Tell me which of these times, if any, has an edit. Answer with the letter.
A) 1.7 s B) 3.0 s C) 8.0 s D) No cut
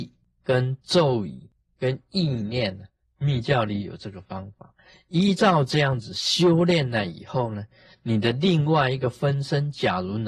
B